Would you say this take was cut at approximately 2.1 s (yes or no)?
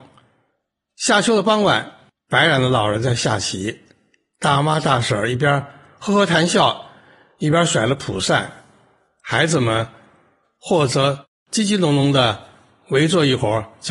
yes